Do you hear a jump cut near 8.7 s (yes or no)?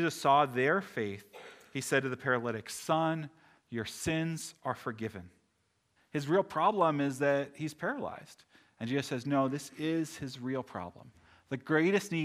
no